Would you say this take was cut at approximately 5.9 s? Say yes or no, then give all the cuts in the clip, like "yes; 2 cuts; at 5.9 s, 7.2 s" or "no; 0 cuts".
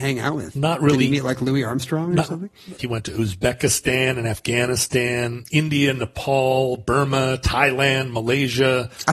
no; 1 cut; at 2.8 s